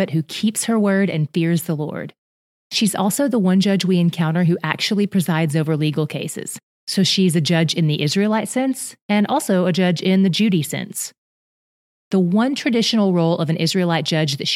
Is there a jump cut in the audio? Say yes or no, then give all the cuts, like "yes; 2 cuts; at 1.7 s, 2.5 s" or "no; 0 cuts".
no; 0 cuts